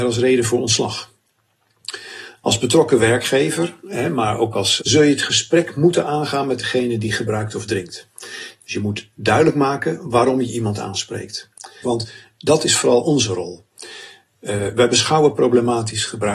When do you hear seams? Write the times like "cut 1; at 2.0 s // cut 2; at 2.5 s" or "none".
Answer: cut 1; at 4.8 s // cut 2; at 11.8 s